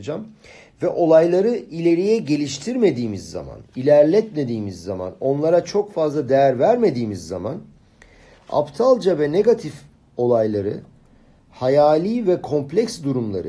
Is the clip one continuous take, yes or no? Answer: yes